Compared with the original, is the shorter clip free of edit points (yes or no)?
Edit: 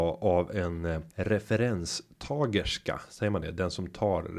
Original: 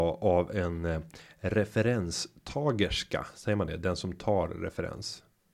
no